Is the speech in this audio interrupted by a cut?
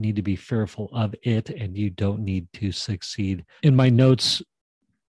yes; 1 cut; at 3.6 s

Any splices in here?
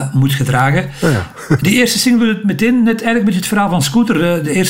no; 0 cuts

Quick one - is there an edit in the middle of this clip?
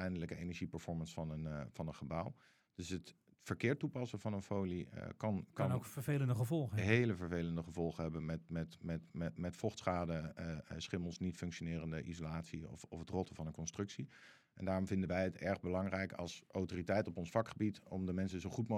no; 0 cuts

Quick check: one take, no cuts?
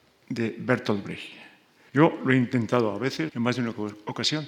no; 2 cuts; at 1.9 s, 3.3 s

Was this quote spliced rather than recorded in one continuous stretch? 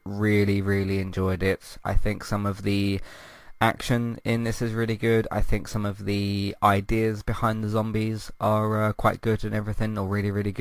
yes; 1 cut; at 1.8 s

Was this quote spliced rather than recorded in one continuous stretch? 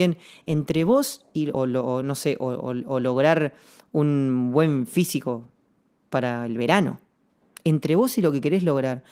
yes; 1 cut; at 1.5 s

